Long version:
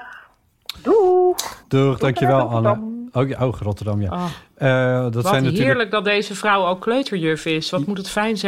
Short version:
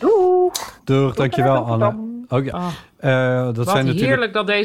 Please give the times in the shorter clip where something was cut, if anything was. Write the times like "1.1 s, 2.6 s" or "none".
2.5 s